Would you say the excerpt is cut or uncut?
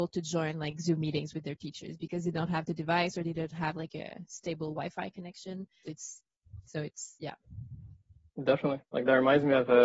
cut